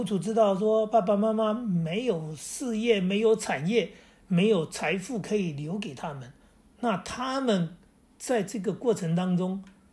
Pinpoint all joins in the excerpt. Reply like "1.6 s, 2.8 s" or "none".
none